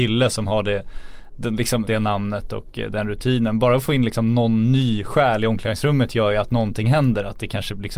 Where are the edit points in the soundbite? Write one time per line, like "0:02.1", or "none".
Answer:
0:01.9